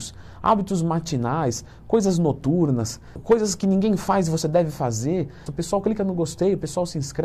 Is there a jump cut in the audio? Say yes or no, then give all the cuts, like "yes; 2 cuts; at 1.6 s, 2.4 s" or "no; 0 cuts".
yes; 2 cuts; at 3.2 s, 5.5 s